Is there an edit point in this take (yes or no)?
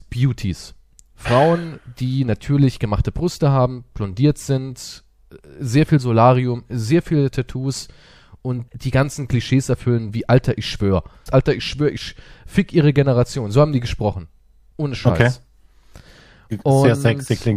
yes